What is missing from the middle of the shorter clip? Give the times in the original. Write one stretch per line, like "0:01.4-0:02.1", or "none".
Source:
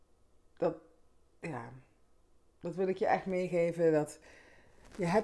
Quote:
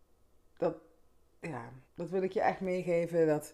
0:01.9-0:02.5